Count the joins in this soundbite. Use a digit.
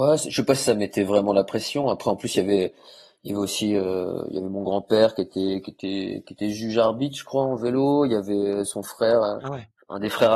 0